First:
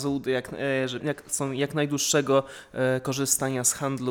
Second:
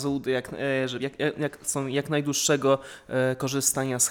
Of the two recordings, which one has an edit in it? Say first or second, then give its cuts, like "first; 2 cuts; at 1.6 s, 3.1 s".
first; 1 cut; at 1.0 s